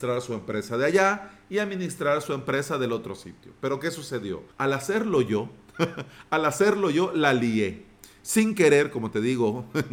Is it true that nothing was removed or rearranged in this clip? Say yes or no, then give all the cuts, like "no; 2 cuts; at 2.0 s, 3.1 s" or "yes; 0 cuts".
no; 1 cut; at 4.5 s